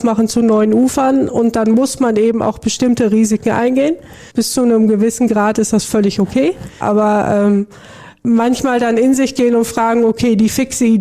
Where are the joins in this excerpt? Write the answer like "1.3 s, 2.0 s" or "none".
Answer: 4.3 s, 6.8 s